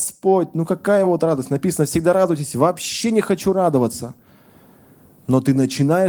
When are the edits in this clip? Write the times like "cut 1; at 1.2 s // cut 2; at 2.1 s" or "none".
none